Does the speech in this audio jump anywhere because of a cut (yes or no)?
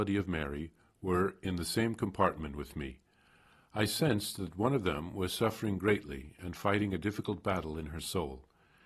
no